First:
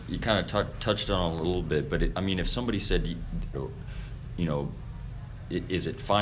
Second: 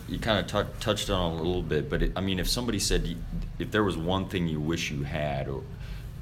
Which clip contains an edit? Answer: first; 1 cut; at 3.5 s

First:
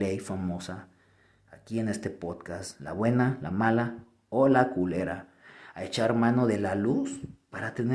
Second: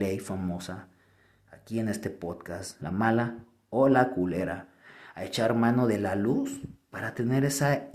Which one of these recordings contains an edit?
second; 1 cut; at 2.8 s

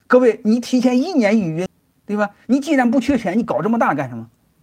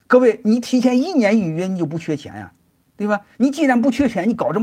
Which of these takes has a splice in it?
first; 1 cut; at 1.7 s

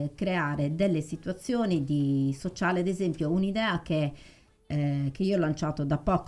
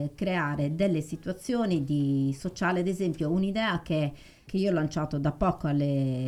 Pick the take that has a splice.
second; 1 cut; at 4.5 s

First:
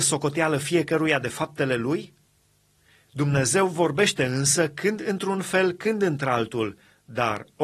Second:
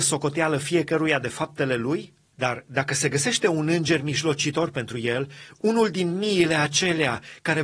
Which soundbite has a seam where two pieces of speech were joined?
second; 1 cut; at 2.3 s

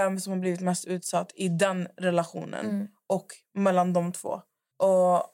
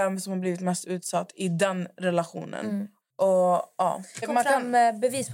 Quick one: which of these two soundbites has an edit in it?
second; 2 cuts; at 3.0 s, 4.2 s

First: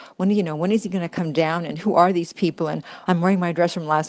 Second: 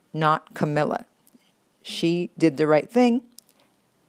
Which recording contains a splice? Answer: first; 1 cut; at 3.0 s

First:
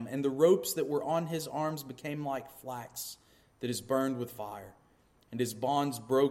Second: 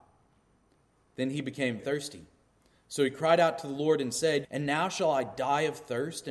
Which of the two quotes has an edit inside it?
second; 2 cuts; at 1.8 s, 4.4 s

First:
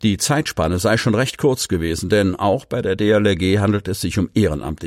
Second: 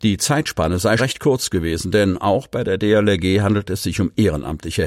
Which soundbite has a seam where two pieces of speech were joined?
second; 1 cut; at 1.0 s

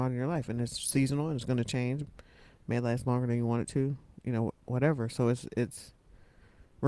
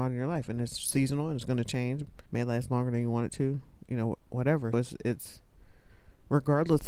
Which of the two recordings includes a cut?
second; 2 cuts; at 2.3 s, 4.7 s

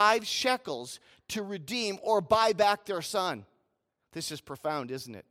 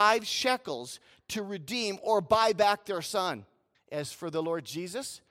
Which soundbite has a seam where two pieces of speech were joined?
second; 1 cut; at 3.7 s

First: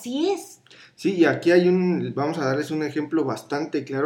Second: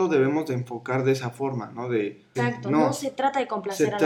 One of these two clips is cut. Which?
second; 1 cut; at 2.3 s

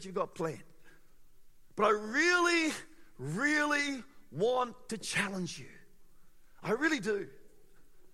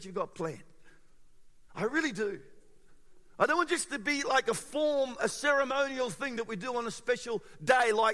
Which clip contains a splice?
second; 2 cuts; at 1.7 s, 5.2 s

